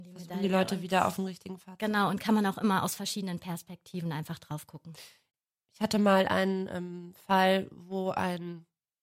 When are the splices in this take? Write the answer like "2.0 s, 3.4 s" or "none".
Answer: none